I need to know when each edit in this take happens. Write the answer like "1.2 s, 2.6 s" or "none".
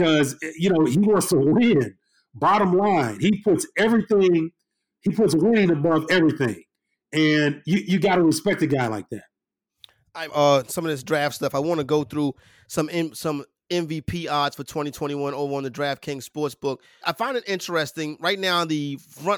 10.3 s, 17.0 s